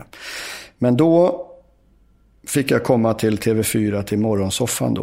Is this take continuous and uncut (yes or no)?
yes